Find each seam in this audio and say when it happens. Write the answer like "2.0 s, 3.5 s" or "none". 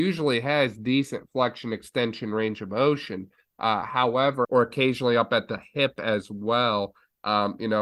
4.4 s

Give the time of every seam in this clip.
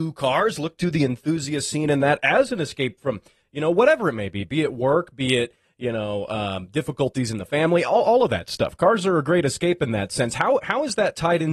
none

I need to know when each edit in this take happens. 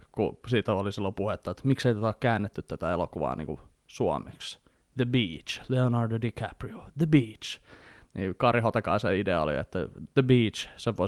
none

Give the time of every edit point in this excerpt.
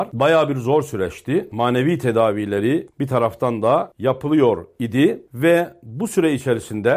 1.5 s

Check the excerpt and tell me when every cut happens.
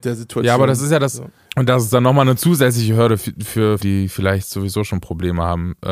1.4 s, 3.8 s

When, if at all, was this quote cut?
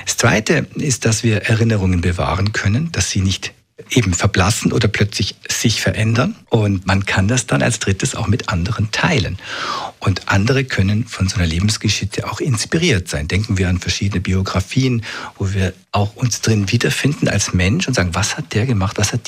6.9 s

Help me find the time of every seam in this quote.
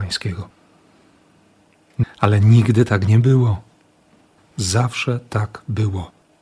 2.0 s, 4.4 s

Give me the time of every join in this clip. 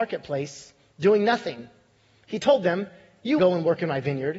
3.4 s

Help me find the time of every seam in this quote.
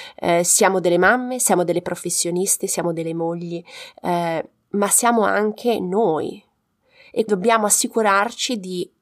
7.3 s

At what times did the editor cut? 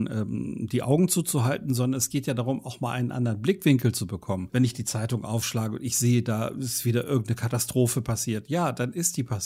4.5 s

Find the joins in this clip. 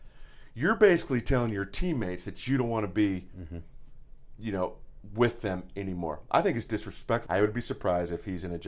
7.3 s

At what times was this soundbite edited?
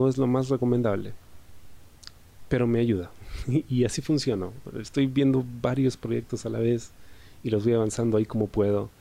none

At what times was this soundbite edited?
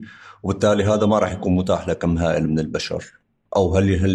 none

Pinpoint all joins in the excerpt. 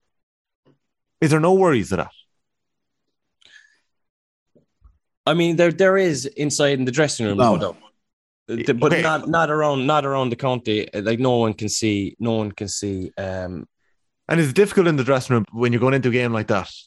15.4 s

